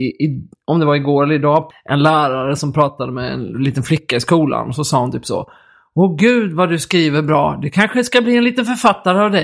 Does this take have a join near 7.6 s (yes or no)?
no